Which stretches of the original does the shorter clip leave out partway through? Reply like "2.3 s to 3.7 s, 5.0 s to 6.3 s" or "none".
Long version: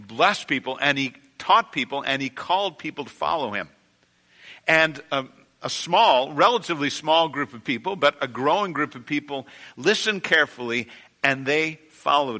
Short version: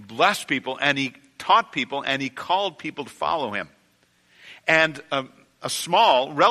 none